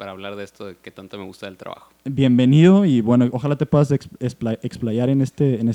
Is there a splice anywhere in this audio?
no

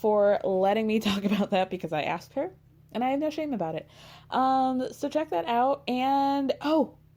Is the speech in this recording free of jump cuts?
yes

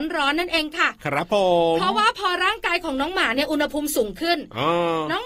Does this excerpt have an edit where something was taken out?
no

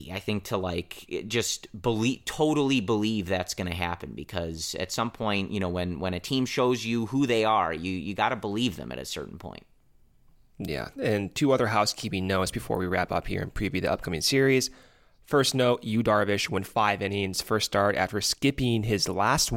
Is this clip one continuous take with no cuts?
yes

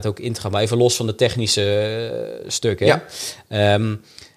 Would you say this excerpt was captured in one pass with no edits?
yes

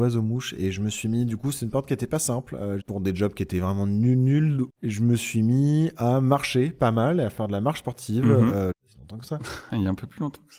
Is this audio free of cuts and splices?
no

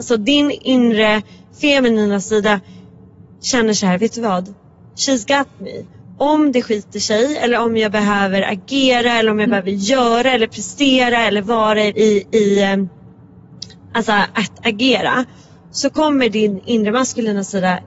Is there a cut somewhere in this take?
yes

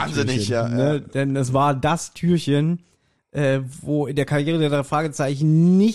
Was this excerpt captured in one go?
yes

